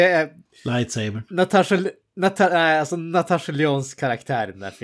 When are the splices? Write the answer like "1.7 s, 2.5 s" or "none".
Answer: none